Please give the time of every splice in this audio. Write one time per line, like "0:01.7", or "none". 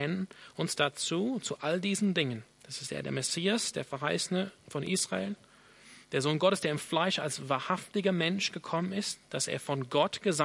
0:02.5